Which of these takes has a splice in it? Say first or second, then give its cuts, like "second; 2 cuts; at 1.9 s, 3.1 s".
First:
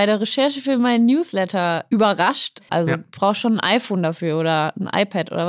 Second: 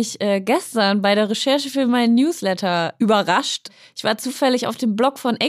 first; 1 cut; at 2.7 s